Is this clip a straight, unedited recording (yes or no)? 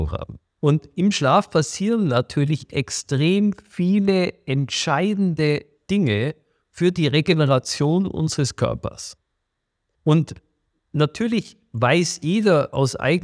no